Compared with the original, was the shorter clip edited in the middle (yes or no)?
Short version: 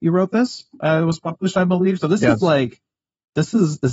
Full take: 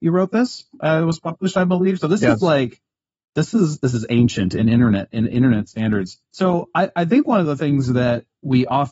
no